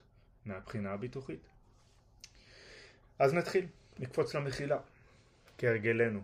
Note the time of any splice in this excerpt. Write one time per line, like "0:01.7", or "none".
none